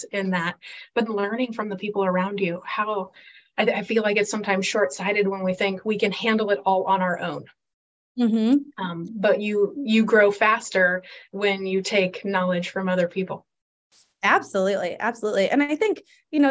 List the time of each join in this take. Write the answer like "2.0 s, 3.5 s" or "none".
1.1 s